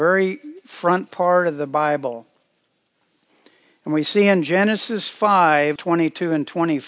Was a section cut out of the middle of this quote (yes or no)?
yes